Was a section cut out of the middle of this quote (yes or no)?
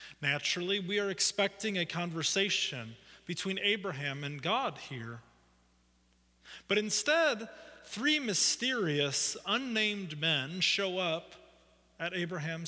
no